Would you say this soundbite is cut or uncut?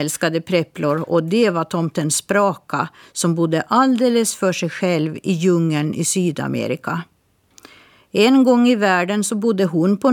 uncut